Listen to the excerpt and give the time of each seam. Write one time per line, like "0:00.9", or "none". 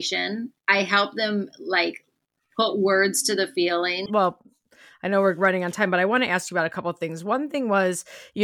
0:04.1

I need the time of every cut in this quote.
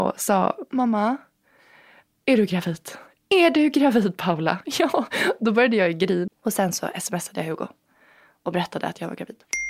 0:06.3

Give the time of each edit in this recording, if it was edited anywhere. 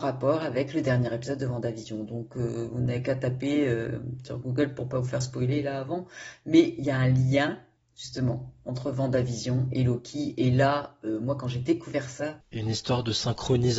none

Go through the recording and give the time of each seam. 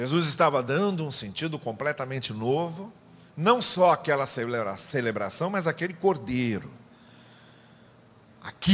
none

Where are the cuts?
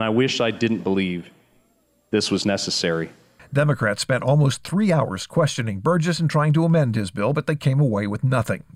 none

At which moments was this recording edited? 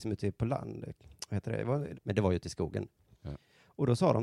0:01.9

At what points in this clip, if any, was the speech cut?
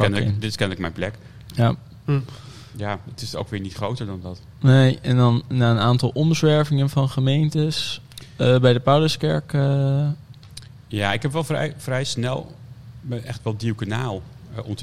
none

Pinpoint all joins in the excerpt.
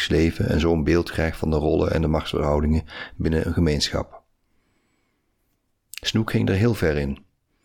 none

